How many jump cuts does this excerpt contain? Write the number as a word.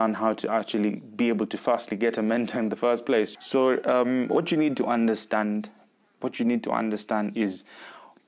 one